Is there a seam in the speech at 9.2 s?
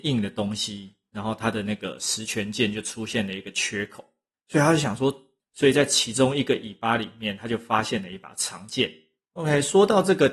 yes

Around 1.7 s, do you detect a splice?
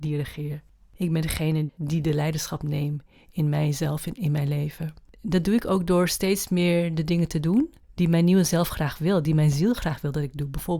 yes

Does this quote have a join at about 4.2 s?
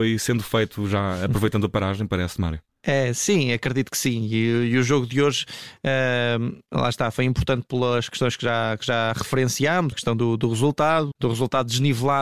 no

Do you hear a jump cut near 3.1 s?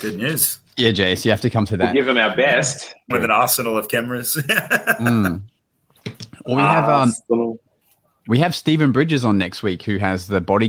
yes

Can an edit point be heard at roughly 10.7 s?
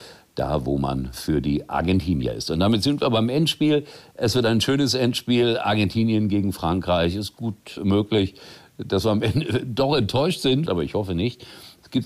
yes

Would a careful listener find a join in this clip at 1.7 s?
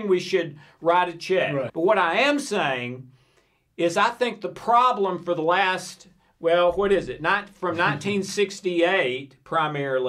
yes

